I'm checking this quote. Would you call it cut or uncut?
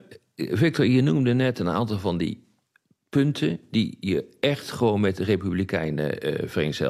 uncut